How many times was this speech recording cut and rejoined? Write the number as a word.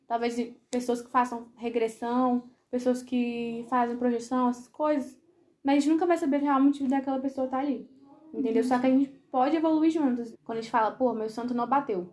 two